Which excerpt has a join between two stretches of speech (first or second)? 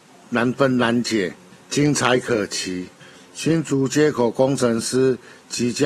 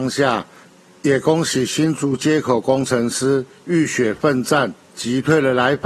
first